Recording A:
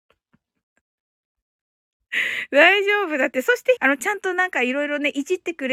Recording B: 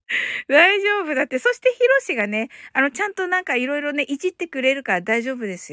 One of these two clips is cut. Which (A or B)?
A